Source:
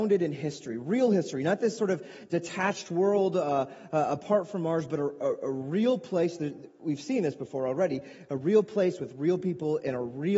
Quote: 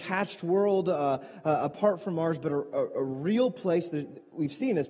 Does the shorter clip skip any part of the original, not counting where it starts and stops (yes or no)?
no